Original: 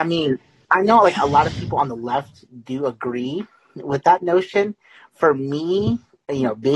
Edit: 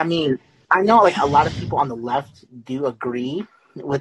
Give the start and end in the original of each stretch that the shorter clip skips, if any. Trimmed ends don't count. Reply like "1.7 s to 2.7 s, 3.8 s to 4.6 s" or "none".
none

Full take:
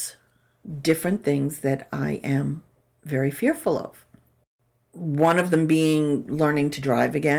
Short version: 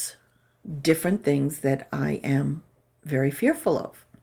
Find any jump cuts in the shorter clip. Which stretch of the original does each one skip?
none

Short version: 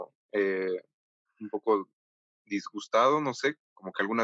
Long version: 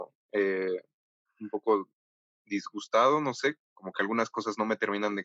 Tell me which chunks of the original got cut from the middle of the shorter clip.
none

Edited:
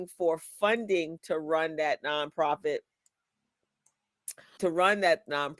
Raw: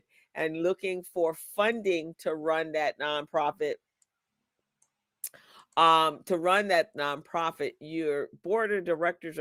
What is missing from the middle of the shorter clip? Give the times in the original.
5.5 s to 6.2 s

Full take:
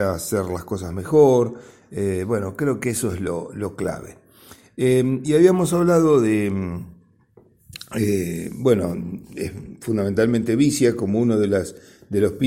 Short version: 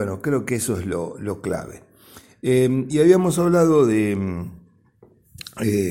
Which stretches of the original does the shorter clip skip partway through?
none

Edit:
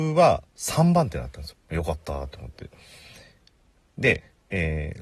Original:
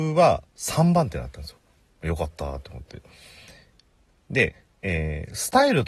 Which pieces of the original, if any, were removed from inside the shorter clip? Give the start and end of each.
1.5 s to 1.9 s

